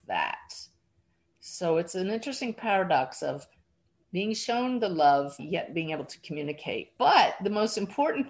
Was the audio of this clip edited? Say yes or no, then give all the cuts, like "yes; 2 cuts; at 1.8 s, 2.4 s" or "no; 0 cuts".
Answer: yes; 2 cuts; at 5.4 s, 7.0 s